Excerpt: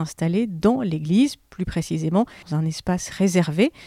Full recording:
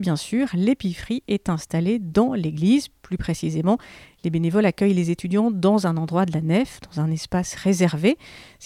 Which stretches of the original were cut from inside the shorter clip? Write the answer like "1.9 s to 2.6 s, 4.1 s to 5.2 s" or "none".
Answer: 3.9 s to 6.9 s